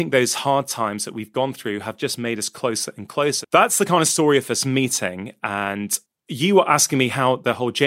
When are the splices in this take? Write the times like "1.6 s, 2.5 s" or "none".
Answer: 3.4 s